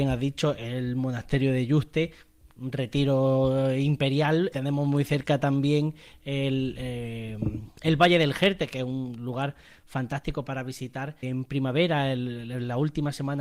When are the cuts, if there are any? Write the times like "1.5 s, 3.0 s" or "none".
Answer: 4.5 s, 11.2 s